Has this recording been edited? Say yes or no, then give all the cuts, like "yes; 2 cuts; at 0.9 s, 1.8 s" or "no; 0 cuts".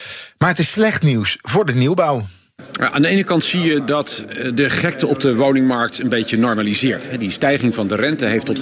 no; 0 cuts